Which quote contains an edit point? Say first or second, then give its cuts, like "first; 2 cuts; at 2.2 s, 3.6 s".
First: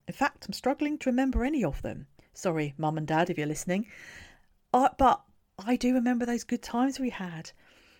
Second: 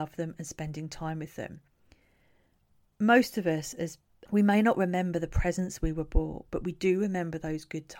second; 1 cut; at 4.3 s